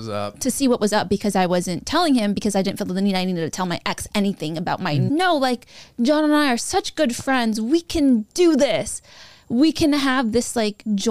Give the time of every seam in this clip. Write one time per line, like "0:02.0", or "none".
0:05.1